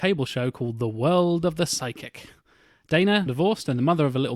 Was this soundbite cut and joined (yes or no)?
yes